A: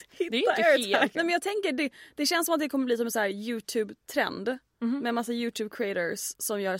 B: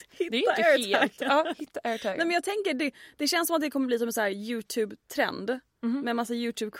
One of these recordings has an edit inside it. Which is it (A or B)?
A